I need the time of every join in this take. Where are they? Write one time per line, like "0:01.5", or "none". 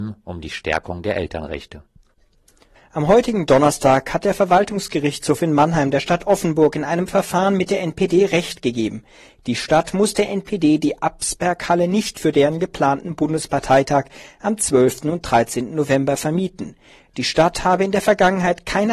0:02.8